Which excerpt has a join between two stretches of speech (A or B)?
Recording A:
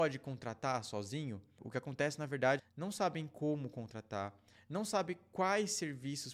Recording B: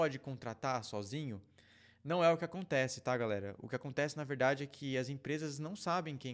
A